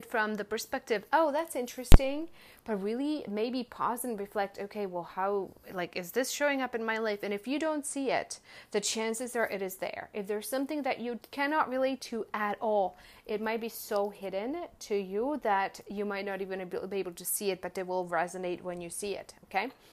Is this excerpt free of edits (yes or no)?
yes